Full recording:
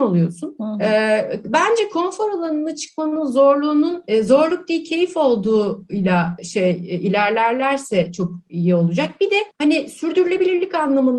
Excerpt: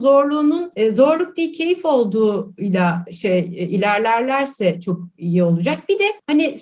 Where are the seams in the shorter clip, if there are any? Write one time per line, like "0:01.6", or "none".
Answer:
none